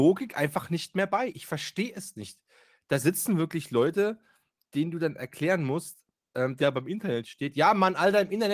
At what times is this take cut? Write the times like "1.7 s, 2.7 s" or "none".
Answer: 6.6 s